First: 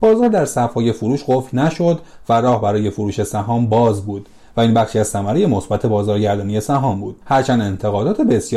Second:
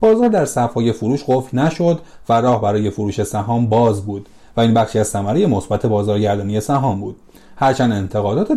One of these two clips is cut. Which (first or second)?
first